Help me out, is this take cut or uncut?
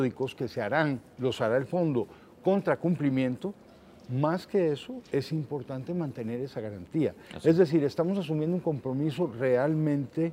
uncut